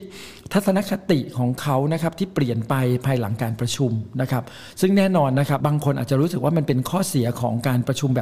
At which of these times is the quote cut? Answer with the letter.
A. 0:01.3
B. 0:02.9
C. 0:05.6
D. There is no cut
C